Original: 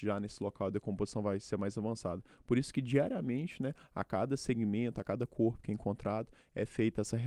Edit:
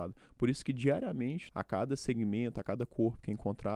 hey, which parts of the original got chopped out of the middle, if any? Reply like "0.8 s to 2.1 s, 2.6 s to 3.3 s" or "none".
3.6 s to 3.9 s

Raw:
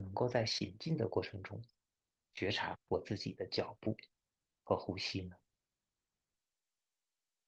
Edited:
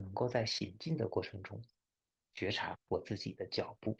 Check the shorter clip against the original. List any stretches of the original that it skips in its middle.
none

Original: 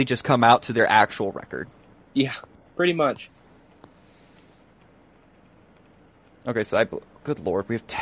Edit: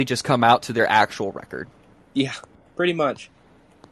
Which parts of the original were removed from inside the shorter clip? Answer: none

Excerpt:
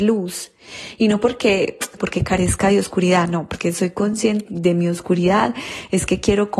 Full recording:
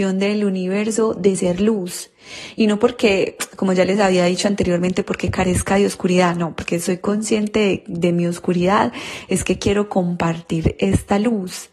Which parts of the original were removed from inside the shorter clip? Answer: 3.6 s to 5.0 s, 7.5 s to 7.8 s

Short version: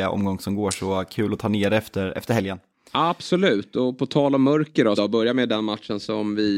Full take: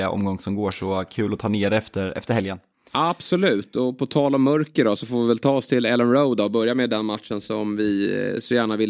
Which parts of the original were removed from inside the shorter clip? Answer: 5.0 s to 6.4 s

